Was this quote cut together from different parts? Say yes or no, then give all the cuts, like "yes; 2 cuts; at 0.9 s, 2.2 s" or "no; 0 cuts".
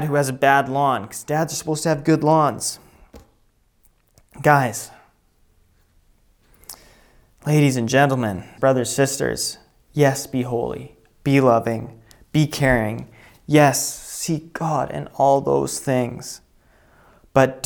yes; 1 cut; at 8.6 s